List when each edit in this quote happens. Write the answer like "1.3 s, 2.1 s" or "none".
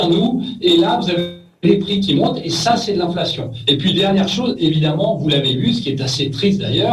none

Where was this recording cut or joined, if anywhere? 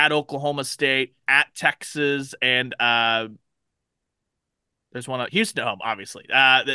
1.2 s, 5.3 s

